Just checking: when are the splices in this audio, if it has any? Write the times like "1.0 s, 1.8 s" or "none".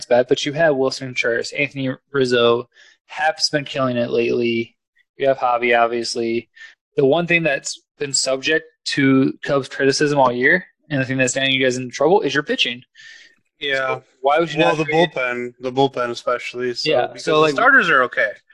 6.7 s